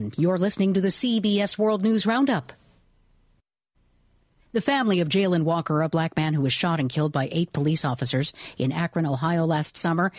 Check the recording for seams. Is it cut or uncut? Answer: uncut